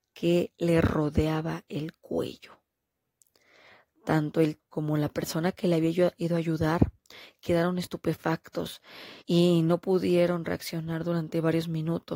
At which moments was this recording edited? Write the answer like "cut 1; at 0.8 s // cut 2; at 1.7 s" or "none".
cut 1; at 4.6 s // cut 2; at 9.2 s